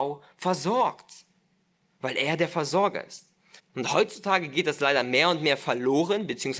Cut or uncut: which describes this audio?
cut